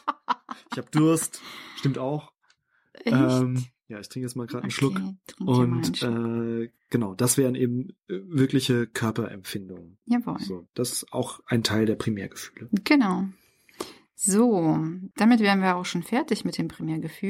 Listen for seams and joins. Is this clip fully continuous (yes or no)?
no